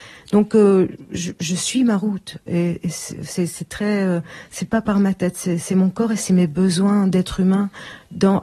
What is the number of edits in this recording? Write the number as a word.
one